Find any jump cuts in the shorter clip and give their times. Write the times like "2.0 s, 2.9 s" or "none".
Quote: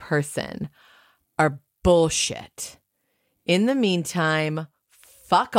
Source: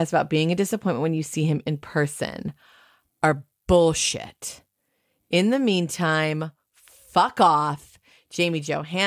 none